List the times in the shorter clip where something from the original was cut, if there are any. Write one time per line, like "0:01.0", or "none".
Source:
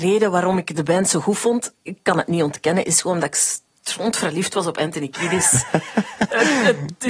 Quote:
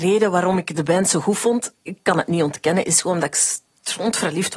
none